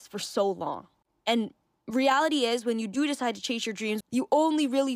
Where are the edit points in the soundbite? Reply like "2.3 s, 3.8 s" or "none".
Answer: 4.0 s